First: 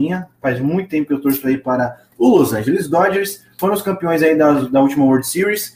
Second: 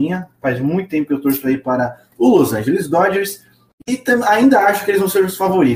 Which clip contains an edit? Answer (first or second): first